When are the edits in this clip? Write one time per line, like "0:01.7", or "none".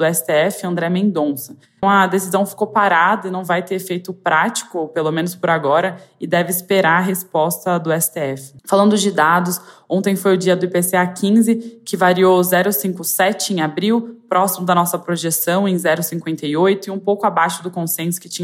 0:01.8
0:08.6